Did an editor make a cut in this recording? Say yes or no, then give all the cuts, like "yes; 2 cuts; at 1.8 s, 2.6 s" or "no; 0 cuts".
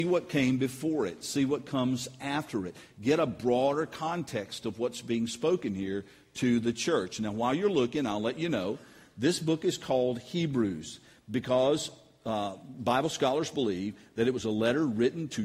no; 0 cuts